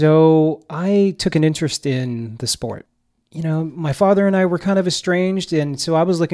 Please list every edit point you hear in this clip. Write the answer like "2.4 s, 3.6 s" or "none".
none